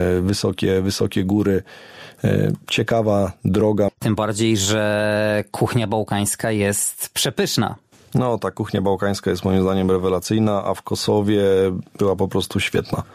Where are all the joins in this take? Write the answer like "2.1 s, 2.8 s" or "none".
3.9 s